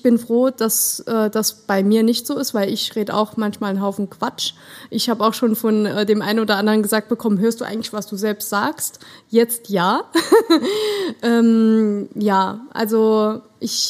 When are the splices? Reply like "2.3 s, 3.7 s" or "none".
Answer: none